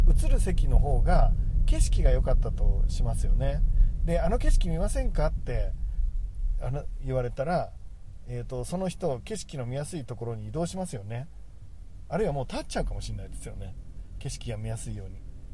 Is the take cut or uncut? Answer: uncut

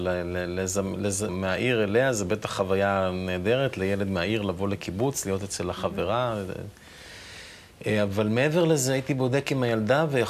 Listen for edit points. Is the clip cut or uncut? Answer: cut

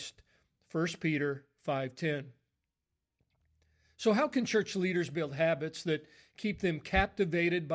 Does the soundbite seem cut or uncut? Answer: uncut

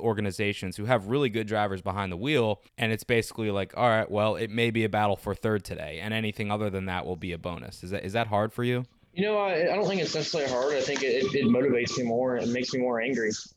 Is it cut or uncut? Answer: cut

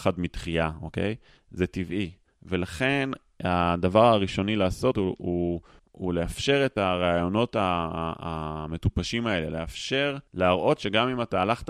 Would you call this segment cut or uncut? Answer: cut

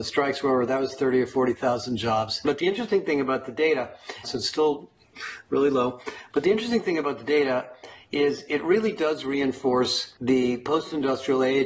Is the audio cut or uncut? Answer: cut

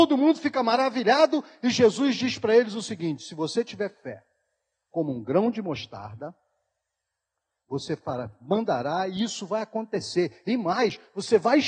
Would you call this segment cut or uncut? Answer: uncut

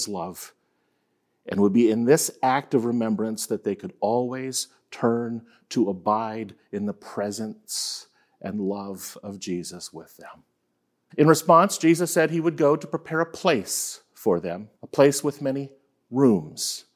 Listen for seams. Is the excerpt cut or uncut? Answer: cut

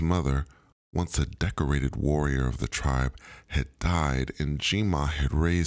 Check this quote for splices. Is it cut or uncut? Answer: uncut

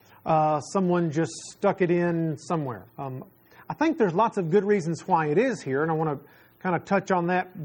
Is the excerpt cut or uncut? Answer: cut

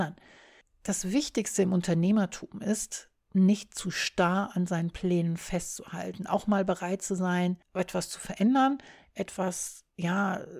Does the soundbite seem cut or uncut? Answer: uncut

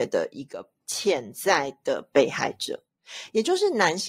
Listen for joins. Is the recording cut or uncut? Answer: uncut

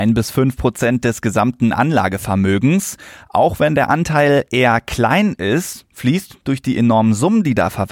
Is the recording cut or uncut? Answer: uncut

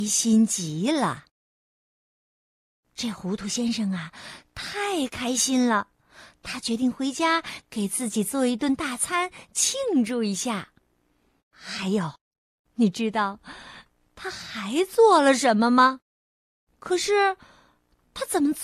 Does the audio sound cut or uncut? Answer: cut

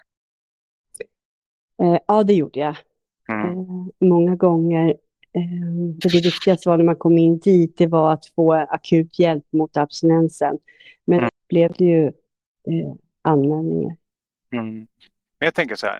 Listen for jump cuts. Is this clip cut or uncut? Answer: cut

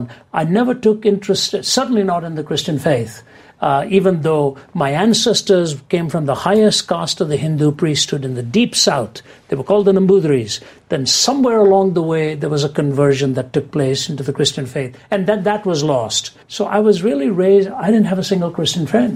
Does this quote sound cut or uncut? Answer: cut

